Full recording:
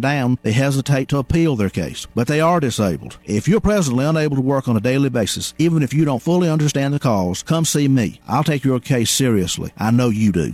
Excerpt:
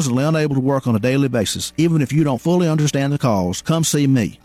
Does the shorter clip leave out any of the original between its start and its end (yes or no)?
no